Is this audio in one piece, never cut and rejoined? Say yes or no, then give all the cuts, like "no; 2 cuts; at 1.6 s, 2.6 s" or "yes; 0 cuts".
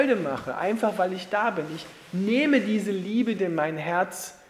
no; 1 cut; at 3.4 s